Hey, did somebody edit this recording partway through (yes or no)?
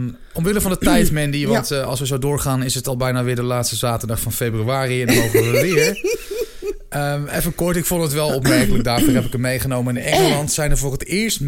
no